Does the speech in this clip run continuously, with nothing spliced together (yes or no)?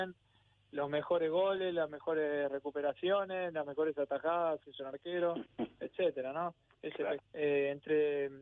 no